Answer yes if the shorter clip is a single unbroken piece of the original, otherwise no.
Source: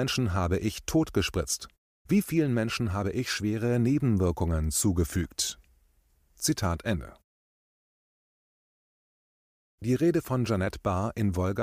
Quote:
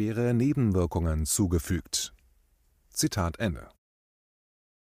yes